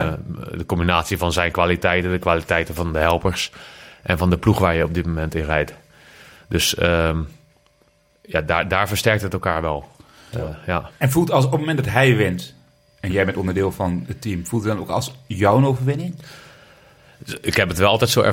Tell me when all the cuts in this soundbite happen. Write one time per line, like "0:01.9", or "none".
none